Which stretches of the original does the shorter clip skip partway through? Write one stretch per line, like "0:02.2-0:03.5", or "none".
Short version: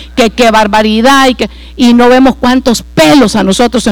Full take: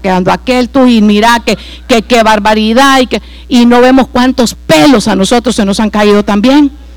none